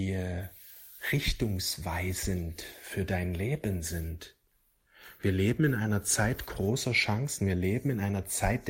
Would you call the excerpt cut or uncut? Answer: uncut